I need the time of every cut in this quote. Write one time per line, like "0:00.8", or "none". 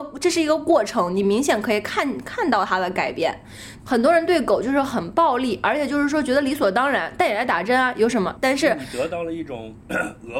0:03.8
0:08.3